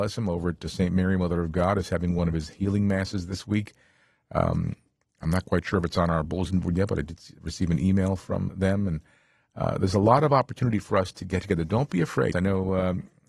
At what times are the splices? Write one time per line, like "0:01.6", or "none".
0:08.5
0:12.3